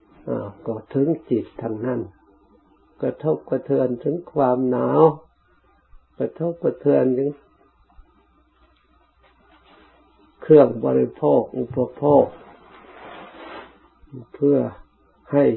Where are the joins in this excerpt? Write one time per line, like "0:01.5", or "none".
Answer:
none